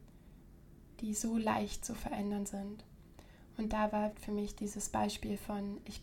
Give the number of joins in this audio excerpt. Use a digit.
1